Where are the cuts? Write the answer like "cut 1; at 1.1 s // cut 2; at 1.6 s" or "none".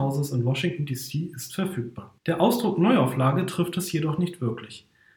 cut 1; at 2.2 s